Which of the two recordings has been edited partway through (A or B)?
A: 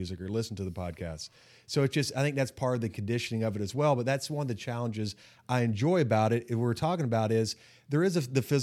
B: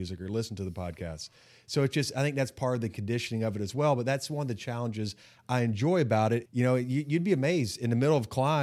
B